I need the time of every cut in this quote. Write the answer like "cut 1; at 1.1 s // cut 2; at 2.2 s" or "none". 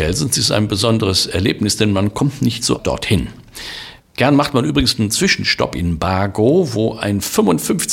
cut 1; at 2.8 s // cut 2; at 4.0 s